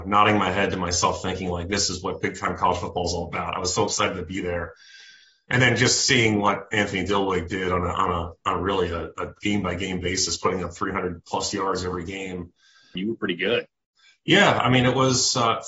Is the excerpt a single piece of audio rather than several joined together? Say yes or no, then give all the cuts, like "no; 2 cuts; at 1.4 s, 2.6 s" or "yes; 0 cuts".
no; 1 cut; at 13.0 s